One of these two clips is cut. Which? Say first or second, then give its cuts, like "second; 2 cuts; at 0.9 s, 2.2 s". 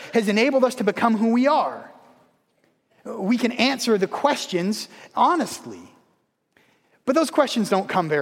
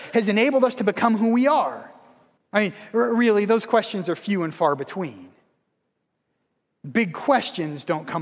second; 1 cut; at 2.4 s